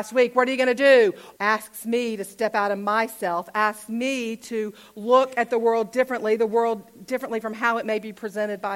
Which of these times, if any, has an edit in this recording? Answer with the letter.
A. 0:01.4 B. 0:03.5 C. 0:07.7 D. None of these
A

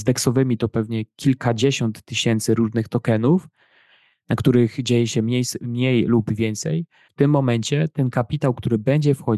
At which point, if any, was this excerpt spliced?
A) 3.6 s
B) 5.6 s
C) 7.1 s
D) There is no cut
C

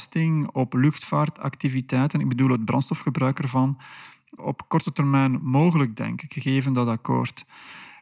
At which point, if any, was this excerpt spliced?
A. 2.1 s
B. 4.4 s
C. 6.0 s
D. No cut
B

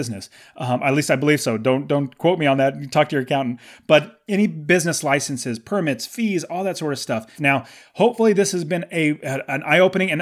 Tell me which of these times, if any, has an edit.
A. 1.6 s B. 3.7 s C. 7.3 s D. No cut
C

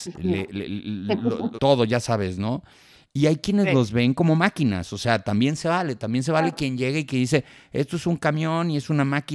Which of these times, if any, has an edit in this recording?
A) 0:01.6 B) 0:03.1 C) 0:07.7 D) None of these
A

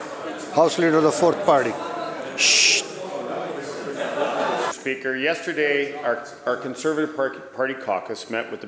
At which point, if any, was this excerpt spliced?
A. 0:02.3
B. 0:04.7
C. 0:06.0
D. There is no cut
B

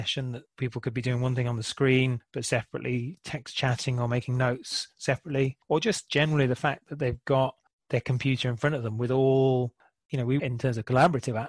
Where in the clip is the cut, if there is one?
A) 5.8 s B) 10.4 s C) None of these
B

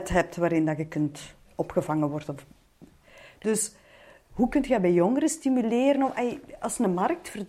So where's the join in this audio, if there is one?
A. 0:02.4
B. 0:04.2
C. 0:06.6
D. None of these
D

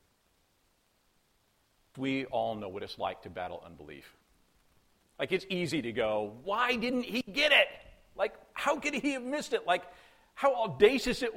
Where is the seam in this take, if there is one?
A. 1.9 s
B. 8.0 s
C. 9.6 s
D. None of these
A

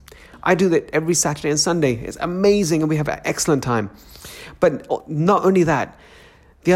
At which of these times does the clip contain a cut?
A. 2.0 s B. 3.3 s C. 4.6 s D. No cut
D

